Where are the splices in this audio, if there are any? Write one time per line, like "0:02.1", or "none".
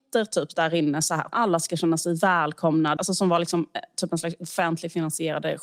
0:01.3
0:03.0